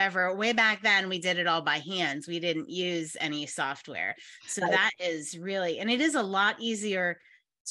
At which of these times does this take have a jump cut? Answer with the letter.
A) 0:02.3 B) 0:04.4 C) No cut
C